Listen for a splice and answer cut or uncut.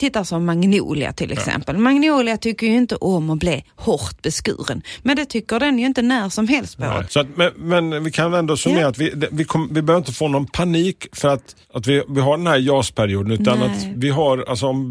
cut